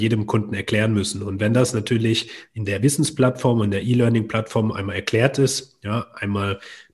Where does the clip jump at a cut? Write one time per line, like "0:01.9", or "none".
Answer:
none